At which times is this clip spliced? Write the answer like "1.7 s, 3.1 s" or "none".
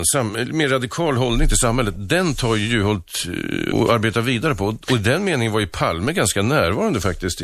3.7 s